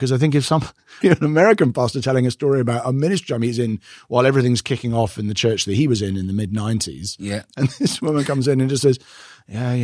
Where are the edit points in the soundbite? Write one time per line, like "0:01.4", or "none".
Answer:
0:01.0